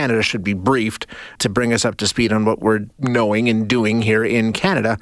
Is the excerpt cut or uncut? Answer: cut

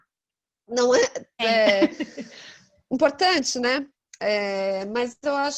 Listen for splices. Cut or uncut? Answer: cut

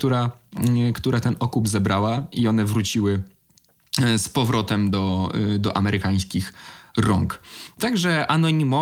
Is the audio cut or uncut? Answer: uncut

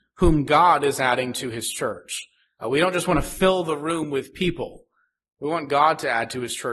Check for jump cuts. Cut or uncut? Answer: uncut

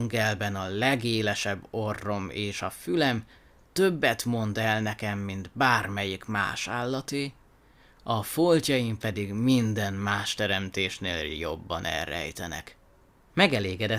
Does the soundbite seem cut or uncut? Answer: uncut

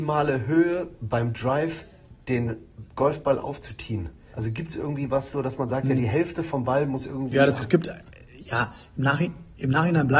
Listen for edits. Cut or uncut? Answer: cut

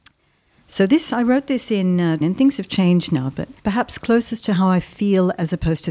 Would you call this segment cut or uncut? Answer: cut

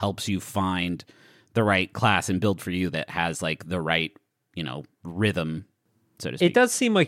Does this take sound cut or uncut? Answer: uncut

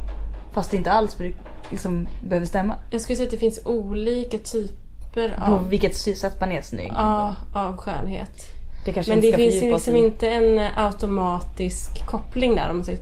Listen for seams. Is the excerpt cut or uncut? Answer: uncut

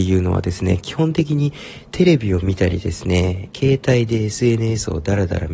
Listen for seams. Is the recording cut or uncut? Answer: cut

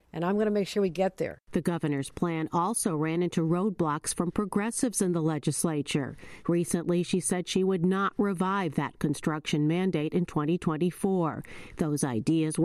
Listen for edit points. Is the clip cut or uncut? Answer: cut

